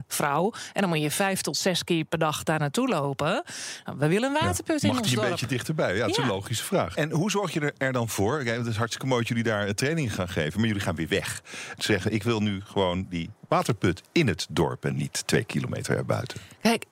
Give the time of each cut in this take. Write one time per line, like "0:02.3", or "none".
0:07.0
0:11.8